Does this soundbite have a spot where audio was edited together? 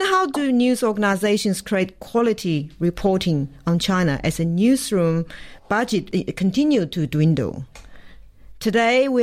no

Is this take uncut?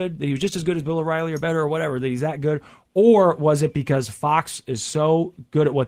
yes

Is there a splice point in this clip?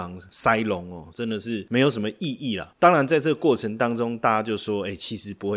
yes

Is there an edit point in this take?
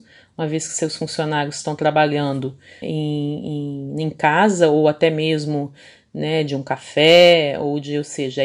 yes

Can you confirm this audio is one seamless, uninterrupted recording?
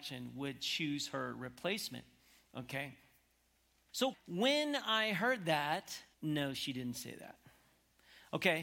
no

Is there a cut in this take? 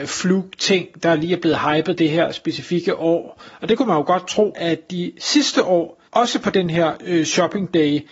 yes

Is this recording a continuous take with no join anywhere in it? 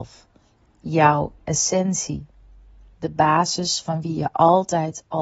yes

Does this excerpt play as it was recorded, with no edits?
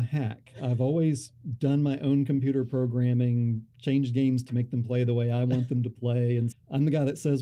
no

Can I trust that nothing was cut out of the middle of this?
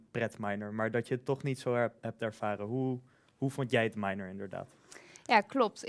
yes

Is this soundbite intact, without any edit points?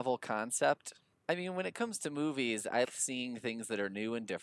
no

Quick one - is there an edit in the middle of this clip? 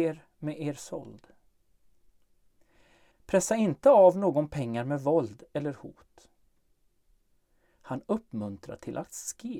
yes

